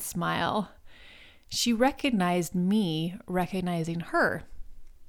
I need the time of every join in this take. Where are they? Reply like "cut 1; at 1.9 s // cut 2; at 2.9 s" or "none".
none